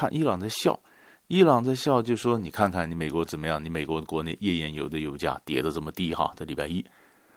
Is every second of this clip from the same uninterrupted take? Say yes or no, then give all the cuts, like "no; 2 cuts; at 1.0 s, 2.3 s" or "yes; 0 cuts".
yes; 0 cuts